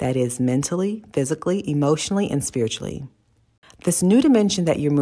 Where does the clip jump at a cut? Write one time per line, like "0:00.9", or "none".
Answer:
none